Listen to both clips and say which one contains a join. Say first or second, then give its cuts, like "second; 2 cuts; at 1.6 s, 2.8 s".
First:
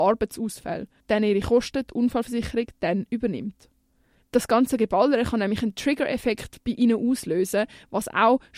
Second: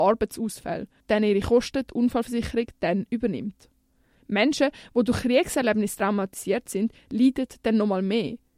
first; 1 cut; at 4.2 s